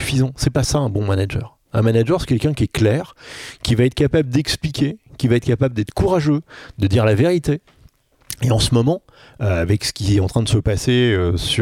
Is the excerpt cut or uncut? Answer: uncut